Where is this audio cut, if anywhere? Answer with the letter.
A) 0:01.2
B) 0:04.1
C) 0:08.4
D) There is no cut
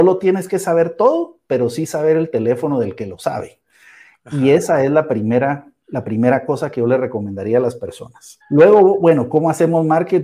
C